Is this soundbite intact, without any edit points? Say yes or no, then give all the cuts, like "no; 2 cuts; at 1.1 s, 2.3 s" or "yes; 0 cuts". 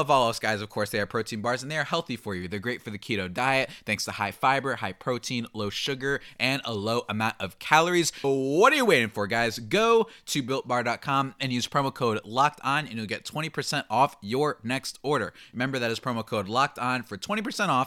no; 1 cut; at 8.2 s